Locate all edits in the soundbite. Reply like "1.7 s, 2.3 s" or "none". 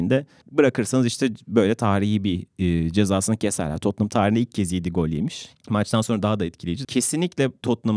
5.5 s, 6.8 s